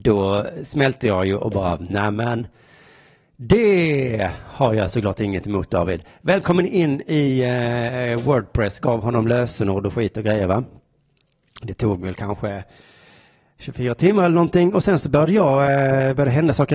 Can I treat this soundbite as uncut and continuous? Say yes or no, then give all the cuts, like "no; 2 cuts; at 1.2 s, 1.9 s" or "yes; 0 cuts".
yes; 0 cuts